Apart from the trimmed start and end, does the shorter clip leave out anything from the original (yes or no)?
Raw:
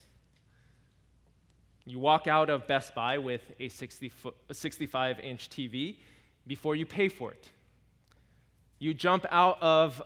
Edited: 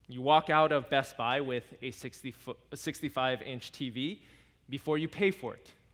no